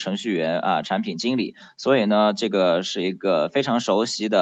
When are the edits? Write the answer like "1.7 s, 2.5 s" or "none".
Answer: none